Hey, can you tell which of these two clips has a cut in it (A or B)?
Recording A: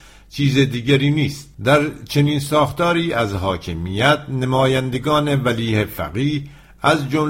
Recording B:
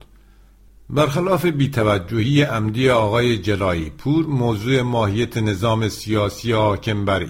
A